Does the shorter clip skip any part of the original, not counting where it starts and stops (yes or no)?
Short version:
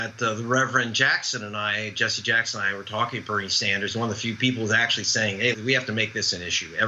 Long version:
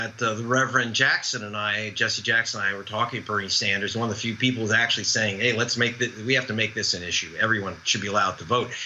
yes